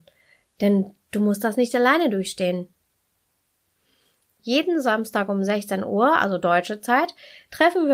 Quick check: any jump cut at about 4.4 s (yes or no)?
yes